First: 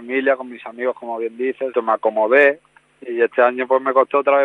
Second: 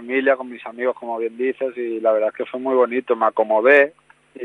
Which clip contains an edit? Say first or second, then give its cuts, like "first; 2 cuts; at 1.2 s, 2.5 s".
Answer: first; 1 cut; at 1.7 s